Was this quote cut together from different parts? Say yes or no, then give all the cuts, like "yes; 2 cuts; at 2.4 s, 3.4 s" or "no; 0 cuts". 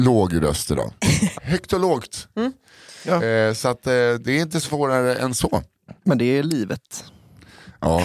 yes; 1 cut; at 1.3 s